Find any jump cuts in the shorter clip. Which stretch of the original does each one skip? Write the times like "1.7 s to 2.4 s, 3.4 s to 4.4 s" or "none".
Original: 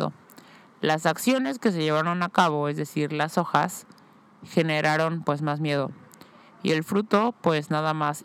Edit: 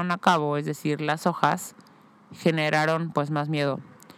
none

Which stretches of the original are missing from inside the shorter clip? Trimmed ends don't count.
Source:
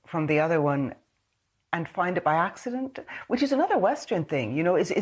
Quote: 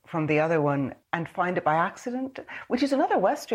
1.0 s to 1.6 s

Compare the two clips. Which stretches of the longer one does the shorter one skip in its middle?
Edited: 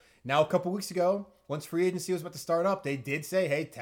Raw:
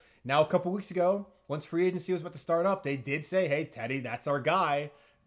none

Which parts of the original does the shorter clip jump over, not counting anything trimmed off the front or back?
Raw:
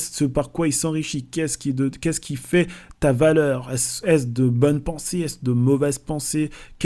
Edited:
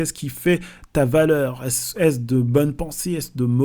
none

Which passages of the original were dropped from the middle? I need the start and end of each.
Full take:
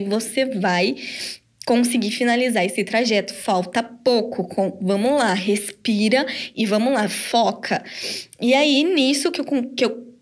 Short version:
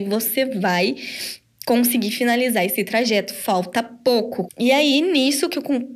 4.5 s to 8.3 s

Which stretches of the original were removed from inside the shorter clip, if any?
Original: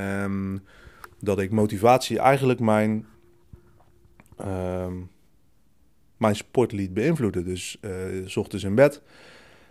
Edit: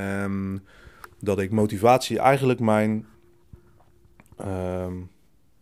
none

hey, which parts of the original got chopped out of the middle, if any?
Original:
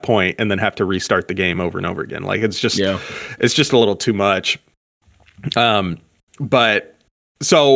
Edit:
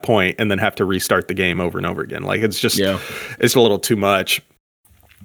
3.5 s to 3.7 s

